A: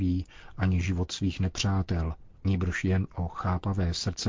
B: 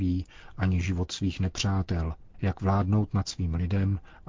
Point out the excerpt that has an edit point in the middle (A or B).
B